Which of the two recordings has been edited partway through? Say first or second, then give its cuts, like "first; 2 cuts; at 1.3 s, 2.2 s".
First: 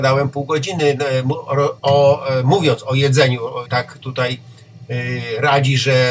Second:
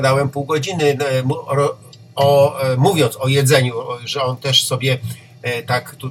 first; 2 cuts; at 1.8 s, 3.7 s